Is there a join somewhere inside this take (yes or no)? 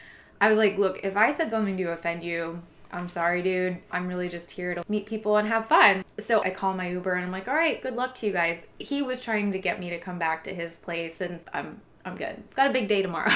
no